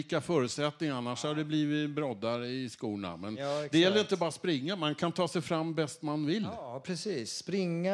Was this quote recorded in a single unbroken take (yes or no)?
yes